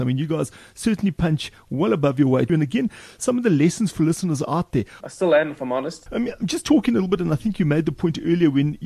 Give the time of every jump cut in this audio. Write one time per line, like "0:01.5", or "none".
0:02.5
0:05.0
0:06.1